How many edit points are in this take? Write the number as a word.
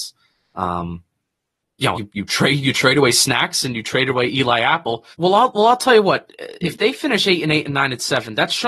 two